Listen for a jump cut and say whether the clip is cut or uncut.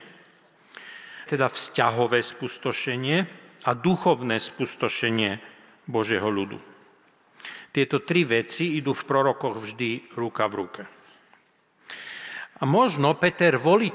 cut